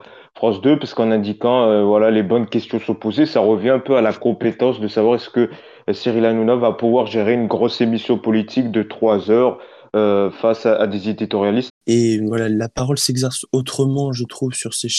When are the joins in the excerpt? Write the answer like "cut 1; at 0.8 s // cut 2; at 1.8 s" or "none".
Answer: cut 1; at 11.7 s